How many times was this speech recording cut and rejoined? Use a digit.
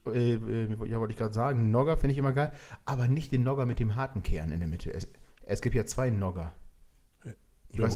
0